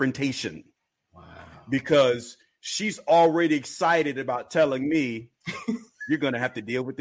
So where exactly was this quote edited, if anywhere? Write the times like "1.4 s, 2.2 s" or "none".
none